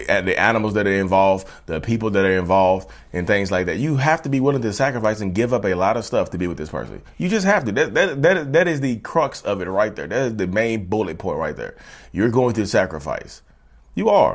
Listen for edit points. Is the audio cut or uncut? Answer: uncut